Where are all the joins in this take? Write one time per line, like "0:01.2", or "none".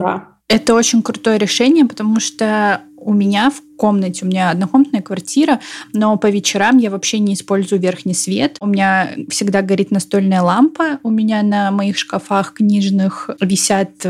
none